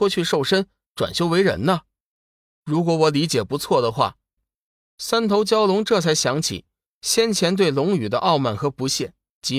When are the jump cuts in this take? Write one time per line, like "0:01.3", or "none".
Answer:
0:04.4

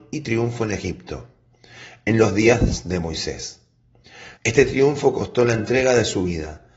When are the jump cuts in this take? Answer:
0:04.4

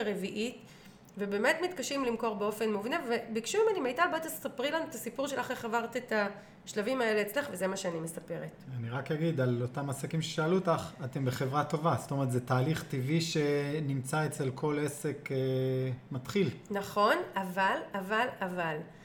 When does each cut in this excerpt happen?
none

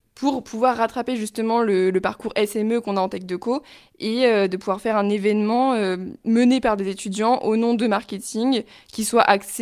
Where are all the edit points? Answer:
none

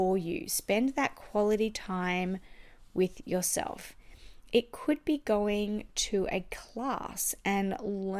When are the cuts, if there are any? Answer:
none

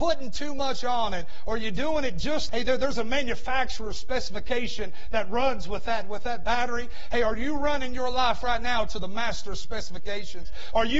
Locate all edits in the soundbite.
0:02.5

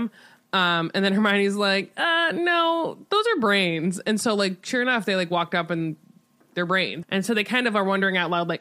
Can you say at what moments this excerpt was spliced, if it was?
0:07.0

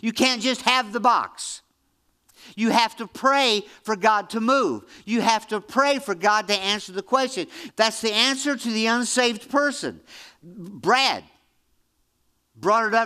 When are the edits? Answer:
0:07.7

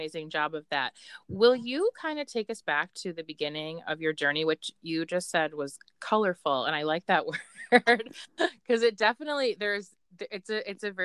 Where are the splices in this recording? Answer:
none

